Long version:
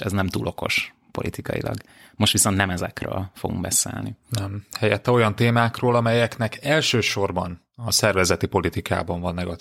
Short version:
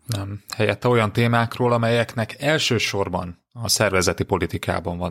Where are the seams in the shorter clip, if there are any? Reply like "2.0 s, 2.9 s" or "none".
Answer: none